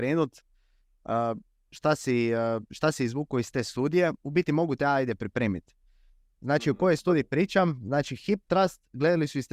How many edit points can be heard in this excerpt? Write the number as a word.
zero